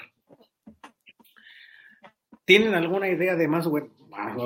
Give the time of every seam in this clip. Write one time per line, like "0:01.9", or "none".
none